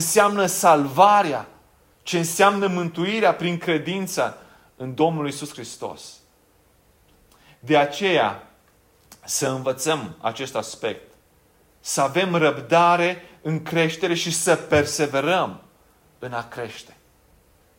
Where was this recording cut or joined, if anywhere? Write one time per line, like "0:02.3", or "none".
none